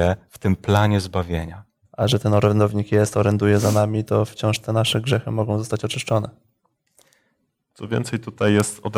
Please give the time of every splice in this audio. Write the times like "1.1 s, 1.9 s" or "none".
1.8 s